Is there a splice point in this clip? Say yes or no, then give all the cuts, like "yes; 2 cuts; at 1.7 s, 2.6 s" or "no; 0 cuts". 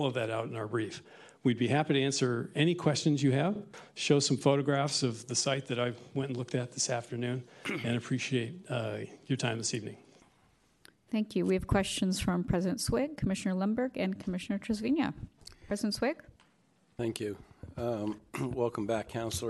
no; 0 cuts